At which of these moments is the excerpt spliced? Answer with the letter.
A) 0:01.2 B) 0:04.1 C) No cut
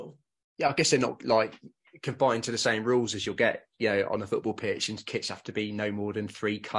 C